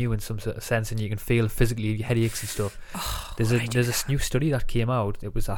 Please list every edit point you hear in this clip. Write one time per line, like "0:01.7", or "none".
none